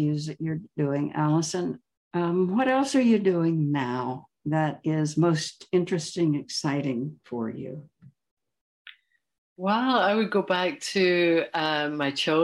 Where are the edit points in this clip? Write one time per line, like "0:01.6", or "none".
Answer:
none

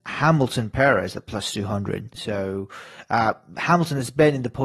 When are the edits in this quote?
0:02.1

